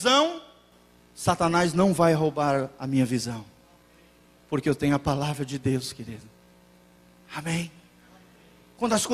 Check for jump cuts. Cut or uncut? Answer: uncut